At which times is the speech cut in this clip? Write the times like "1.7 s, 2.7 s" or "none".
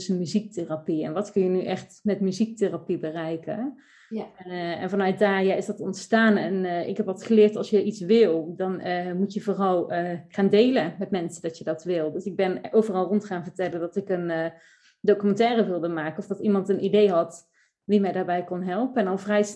none